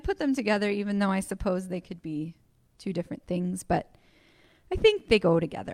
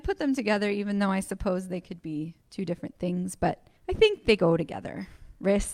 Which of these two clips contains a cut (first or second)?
second